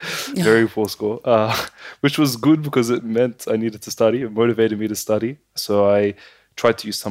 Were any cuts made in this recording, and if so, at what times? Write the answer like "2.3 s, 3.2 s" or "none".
none